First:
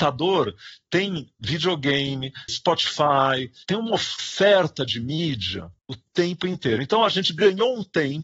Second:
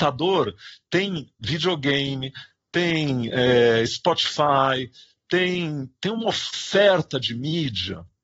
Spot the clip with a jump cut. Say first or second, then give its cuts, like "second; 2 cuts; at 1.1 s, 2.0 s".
first; 3 cuts; at 2.5 s, 3.6 s, 5.8 s